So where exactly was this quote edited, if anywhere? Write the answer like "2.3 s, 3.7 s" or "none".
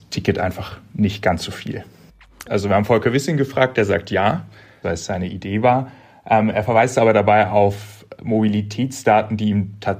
2.5 s, 4.8 s